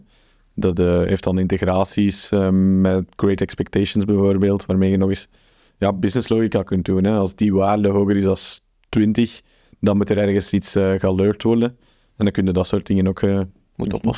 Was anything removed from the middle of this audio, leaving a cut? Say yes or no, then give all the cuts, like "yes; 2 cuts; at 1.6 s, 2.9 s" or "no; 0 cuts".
no; 0 cuts